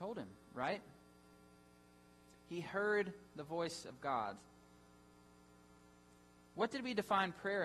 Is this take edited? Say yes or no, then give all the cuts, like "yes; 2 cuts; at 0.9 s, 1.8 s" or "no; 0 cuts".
no; 0 cuts